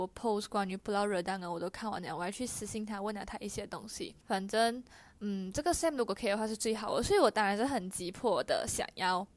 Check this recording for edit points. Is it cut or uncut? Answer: cut